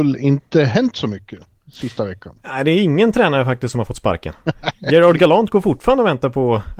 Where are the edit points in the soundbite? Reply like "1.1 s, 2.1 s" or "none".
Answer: none

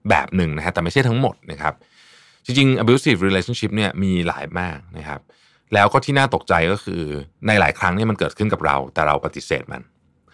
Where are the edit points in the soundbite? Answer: 4.5 s, 7.3 s

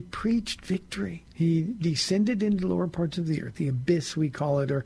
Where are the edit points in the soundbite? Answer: 1.3 s, 3.5 s

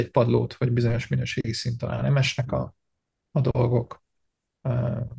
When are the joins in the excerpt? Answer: none

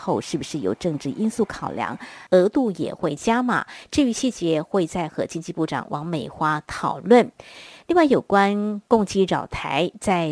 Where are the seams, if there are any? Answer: 2.3 s

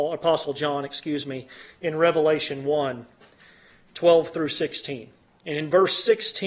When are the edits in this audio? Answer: none

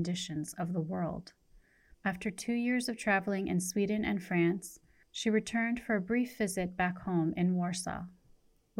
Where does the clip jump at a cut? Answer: 1.9 s

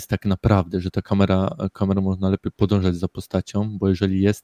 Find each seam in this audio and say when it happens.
none

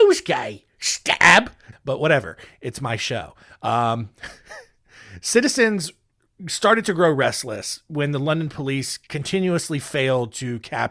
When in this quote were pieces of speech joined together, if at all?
1.7 s

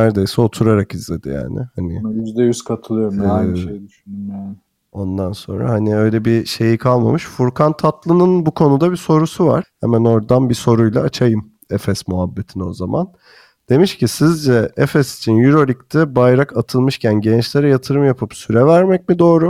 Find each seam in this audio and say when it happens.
9.6 s

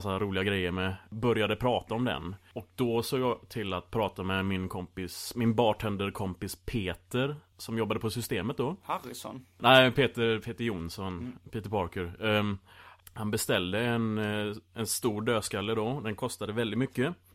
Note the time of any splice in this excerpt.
none

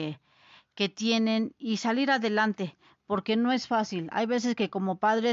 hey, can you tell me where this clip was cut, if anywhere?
none

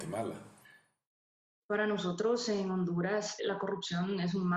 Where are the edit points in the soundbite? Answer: 3.4 s

